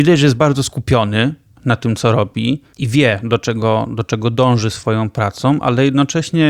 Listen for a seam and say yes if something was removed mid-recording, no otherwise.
no